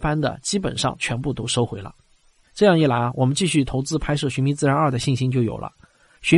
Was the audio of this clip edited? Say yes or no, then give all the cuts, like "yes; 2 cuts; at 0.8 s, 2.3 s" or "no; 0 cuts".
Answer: no; 0 cuts